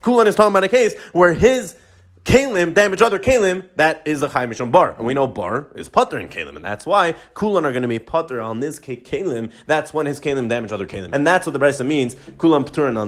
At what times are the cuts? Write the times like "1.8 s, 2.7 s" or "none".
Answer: 11.1 s